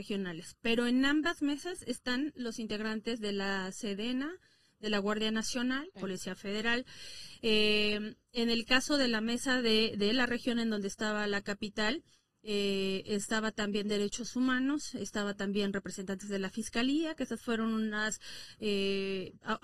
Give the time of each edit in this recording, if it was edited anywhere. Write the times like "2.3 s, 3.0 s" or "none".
6.0 s

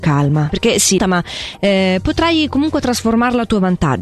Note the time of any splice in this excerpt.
1.0 s

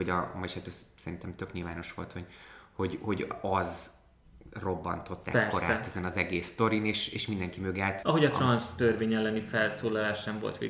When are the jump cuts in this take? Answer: 8.0 s

